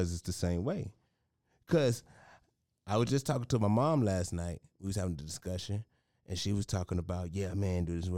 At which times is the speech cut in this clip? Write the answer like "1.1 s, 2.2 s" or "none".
none